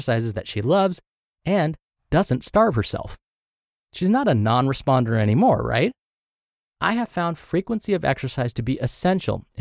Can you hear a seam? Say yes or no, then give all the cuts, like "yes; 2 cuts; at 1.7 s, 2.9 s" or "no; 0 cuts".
no; 0 cuts